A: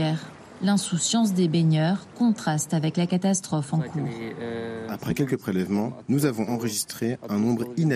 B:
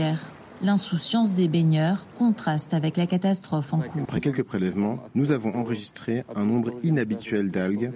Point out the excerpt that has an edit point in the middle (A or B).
B